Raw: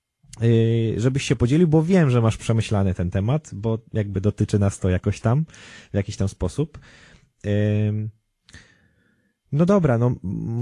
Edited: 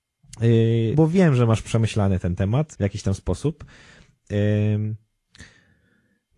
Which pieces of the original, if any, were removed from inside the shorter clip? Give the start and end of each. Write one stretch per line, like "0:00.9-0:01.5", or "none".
0:00.9-0:01.7
0:03.5-0:05.9